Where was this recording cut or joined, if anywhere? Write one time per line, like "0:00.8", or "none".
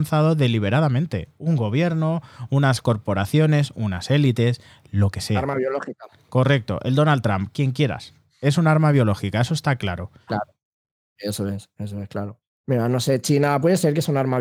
0:10.3